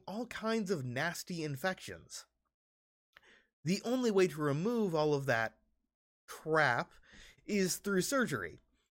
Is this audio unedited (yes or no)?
yes